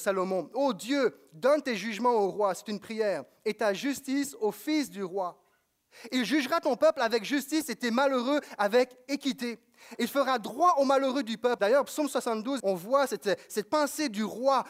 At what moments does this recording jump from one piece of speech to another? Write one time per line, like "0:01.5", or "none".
0:11.6
0:12.6